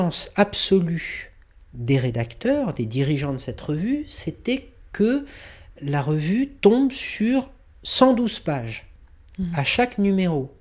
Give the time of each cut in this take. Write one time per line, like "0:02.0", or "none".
none